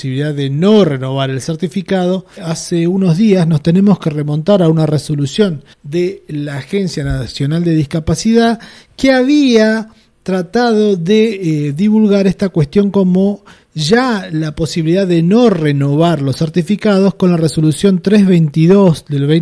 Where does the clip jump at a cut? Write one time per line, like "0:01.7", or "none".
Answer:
0:02.4
0:05.7